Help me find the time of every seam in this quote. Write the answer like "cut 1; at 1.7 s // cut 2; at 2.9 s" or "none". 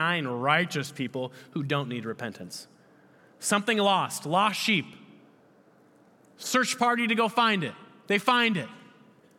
none